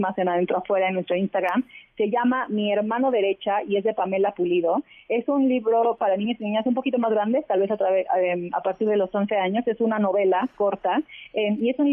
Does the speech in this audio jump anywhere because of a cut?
no; 0 cuts

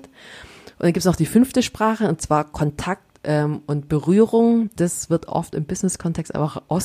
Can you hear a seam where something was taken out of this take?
no; 0 cuts

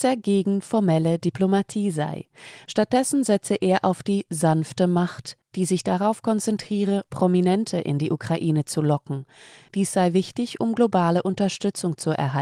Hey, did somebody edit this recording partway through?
no; 0 cuts

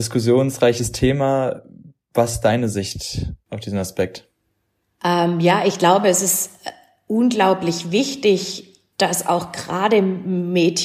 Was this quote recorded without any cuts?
yes; 0 cuts

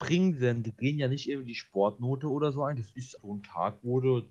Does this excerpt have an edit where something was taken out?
yes; 1 cut; at 3.2 s

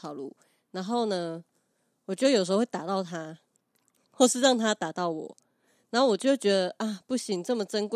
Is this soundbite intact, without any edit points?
yes; 0 cuts

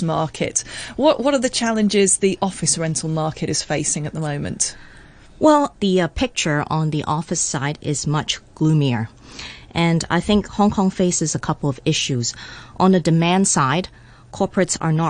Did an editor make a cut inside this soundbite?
yes; 1 cut; at 5.8 s

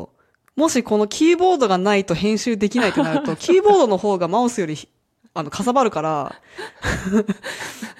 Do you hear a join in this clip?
no; 0 cuts

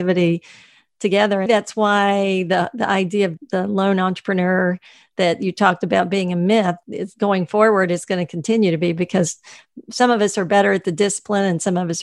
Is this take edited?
yes; 2 cuts; at 1.5 s, 6.8 s

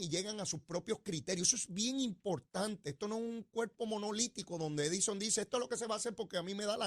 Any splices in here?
no; 0 cuts

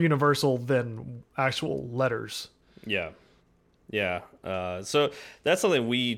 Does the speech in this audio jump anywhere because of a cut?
no; 0 cuts

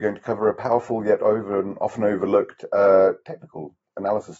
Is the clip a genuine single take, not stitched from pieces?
yes; 0 cuts

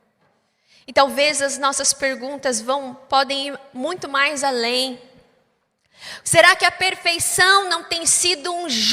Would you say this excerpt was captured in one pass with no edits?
no; 1 cut; at 6.2 s

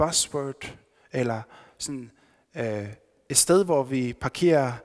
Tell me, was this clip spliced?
no; 0 cuts

